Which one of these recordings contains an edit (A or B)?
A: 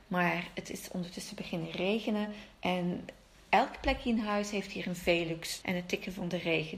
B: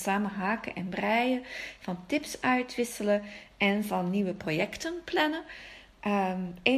A